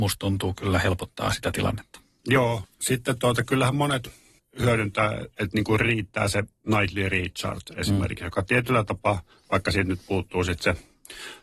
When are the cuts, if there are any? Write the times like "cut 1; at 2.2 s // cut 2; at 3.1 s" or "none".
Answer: none